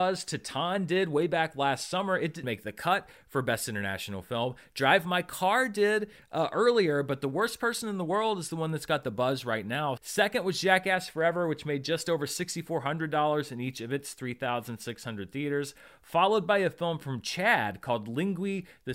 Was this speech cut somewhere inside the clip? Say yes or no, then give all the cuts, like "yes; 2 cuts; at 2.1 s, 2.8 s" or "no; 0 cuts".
yes; 2 cuts; at 2.4 s, 10.0 s